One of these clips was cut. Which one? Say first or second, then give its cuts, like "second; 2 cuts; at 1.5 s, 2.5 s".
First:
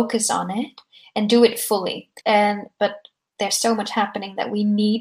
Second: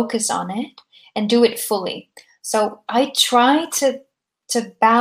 first; 1 cut; at 2.2 s